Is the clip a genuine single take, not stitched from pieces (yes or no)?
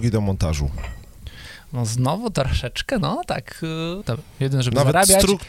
no